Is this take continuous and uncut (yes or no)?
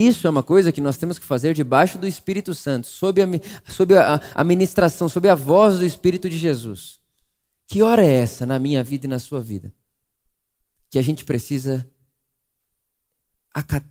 yes